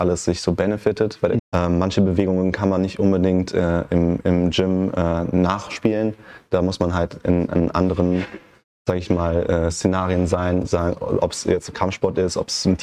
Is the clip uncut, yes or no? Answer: no